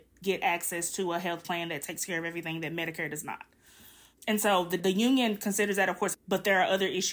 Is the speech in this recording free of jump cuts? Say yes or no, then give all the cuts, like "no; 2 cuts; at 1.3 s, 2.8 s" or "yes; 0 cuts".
no; 2 cuts; at 4.8 s, 6.1 s